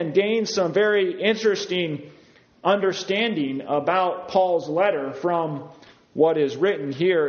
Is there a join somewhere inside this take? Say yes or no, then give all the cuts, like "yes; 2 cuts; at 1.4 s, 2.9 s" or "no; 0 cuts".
no; 0 cuts